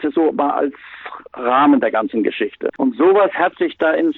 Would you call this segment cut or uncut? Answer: cut